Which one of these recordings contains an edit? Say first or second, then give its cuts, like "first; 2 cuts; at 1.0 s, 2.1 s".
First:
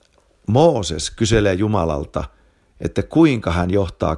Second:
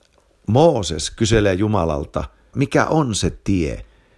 second; 1 cut; at 2.5 s